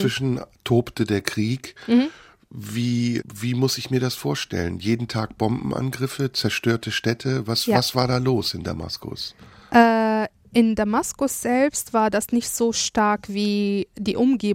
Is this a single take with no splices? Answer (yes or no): no